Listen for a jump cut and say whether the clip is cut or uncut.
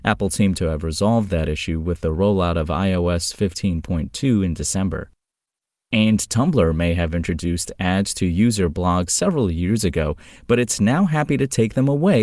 uncut